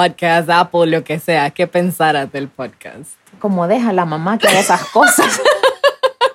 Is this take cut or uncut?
cut